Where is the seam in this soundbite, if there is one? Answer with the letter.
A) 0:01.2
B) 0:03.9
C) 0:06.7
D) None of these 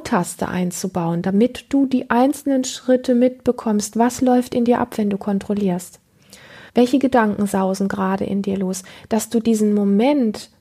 C